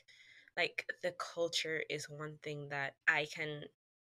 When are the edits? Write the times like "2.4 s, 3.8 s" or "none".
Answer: 3.0 s